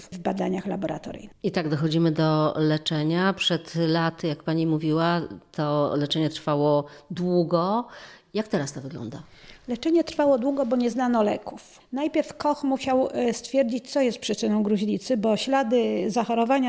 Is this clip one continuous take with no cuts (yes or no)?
yes